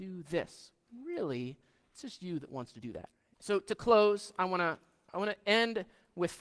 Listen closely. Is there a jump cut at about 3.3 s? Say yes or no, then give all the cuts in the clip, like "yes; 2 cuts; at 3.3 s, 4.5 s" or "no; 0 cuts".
yes; 1 cut; at 3.3 s